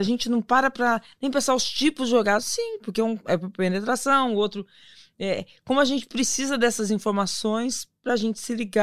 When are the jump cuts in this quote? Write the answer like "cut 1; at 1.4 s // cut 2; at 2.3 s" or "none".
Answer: none